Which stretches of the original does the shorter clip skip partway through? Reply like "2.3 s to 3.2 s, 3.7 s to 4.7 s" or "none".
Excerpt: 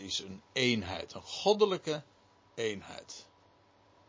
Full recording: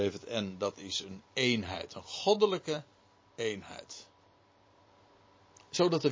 none